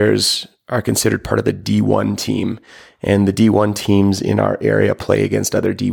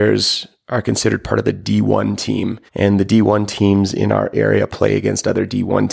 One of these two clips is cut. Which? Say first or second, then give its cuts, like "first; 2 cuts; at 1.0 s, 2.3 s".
second; 1 cut; at 2.7 s